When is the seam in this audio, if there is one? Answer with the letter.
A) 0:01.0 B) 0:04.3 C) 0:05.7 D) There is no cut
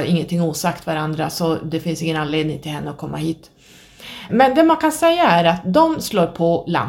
B